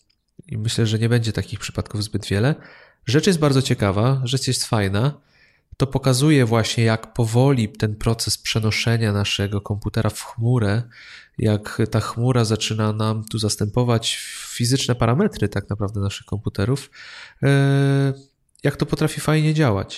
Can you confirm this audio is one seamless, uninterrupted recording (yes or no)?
yes